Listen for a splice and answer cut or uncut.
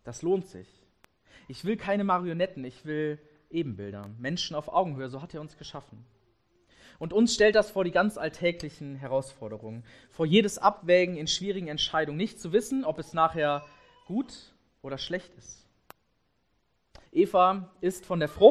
cut